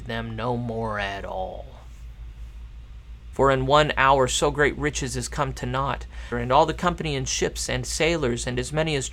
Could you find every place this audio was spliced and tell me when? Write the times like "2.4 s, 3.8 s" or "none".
3.3 s, 6.3 s